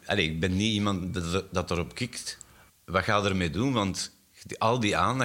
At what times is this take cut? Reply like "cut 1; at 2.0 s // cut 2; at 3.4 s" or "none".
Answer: cut 1; at 2.7 s